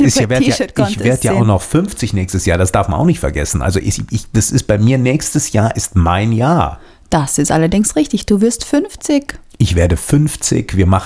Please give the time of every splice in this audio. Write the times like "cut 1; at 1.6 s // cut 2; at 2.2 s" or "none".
none